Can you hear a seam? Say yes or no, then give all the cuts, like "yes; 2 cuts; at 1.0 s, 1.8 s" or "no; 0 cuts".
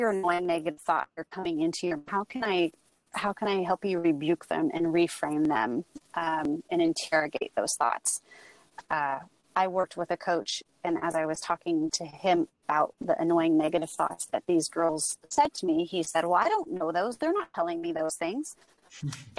no; 0 cuts